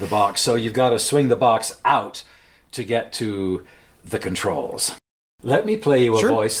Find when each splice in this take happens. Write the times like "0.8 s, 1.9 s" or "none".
none